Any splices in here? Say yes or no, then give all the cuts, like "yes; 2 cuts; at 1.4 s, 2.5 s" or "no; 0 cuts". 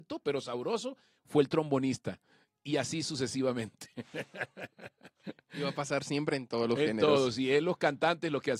no; 0 cuts